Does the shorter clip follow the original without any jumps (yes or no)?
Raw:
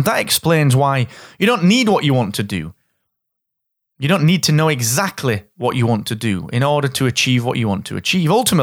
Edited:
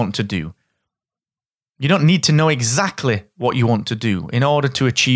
yes